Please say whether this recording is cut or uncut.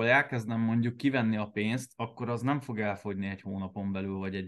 uncut